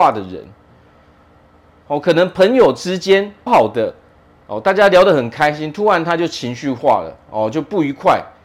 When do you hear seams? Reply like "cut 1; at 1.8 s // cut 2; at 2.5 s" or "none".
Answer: cut 1; at 3.5 s